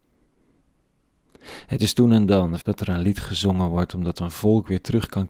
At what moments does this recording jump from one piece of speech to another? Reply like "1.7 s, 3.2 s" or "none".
2.6 s

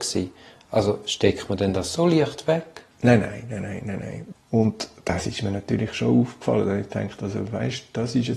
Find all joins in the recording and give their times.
2.9 s, 4.3 s

